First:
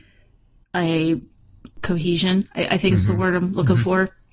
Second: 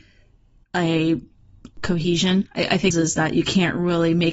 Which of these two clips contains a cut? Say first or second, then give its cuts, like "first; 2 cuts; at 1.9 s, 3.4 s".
second; 1 cut; at 2.9 s